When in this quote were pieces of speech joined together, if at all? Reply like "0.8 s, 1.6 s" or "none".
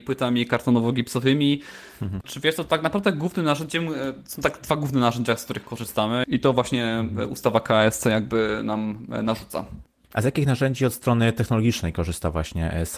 2.2 s, 6.2 s